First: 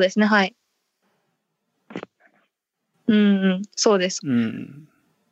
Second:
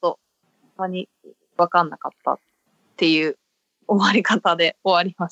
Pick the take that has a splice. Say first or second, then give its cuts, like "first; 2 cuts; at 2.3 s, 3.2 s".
first; 2 cuts; at 2.9 s, 4.2 s